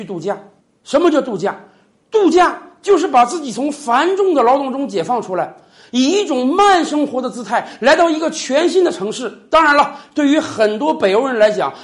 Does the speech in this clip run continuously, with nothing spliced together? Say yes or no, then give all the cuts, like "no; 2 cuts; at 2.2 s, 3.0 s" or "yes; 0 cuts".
yes; 0 cuts